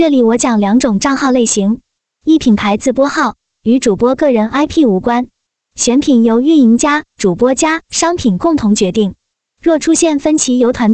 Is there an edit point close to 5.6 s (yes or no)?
no